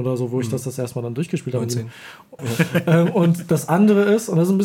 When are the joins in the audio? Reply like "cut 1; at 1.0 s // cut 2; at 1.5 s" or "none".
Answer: cut 1; at 2.4 s